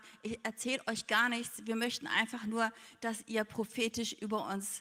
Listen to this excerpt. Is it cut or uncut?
uncut